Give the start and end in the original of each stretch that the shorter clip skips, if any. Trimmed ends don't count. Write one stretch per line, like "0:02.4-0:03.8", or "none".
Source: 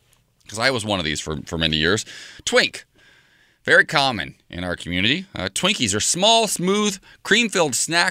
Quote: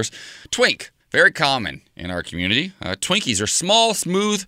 0:02.9-0:03.5